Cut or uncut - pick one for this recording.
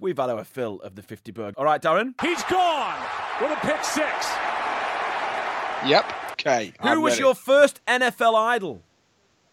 cut